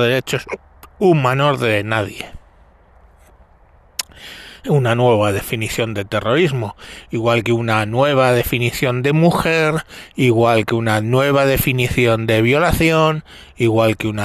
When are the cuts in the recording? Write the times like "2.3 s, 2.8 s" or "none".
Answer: none